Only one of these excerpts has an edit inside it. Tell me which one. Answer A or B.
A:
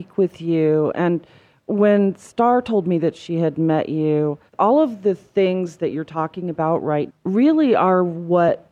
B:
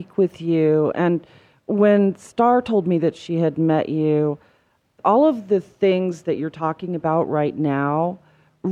A